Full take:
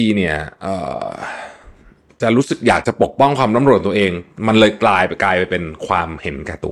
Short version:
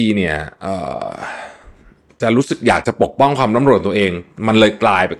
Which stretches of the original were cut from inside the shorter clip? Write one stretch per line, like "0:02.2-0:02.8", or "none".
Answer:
none